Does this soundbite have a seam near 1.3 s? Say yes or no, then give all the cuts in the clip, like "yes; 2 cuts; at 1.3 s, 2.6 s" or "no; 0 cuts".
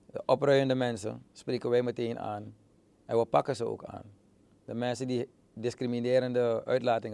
yes; 1 cut; at 1.3 s